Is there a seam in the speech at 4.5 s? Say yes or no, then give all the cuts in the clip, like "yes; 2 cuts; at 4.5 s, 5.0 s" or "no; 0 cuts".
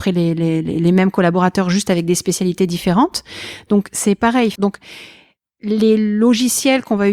yes; 1 cut; at 4.5 s